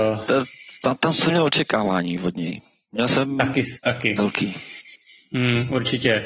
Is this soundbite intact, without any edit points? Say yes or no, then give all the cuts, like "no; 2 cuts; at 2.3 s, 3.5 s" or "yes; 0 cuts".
yes; 0 cuts